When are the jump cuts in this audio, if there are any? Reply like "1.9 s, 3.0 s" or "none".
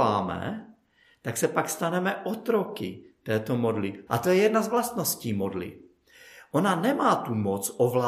4.1 s